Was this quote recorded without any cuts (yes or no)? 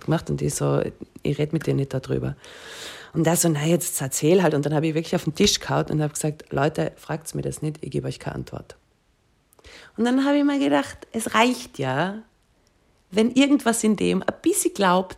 yes